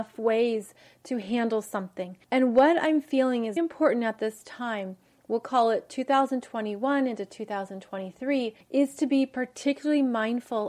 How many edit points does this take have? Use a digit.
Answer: 1